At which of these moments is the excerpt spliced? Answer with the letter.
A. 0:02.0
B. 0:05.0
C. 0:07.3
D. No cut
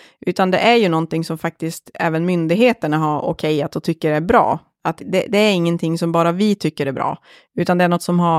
B